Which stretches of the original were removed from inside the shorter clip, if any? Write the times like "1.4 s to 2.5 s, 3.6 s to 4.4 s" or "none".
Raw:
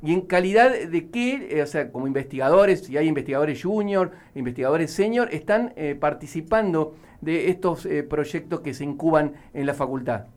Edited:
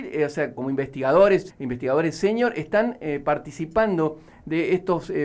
2.9 s to 4.3 s

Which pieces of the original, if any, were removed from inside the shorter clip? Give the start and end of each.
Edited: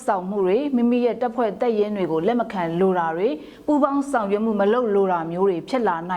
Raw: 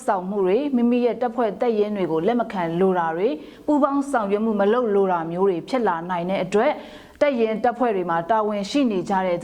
none

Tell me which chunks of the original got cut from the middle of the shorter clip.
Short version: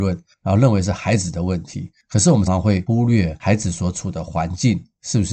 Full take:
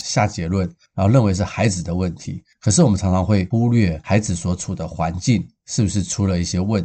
3.0 s to 3.1 s

